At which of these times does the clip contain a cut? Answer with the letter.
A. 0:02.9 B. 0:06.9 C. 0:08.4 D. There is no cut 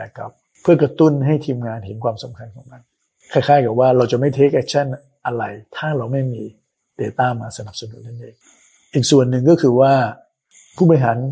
D